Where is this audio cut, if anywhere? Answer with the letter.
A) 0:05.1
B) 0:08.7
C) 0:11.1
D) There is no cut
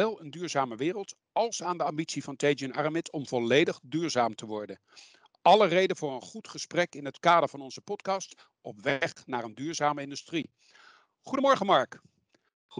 D